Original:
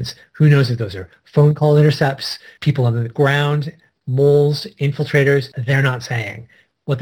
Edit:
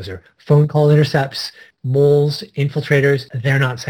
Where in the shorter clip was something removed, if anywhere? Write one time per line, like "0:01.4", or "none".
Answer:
0:01.7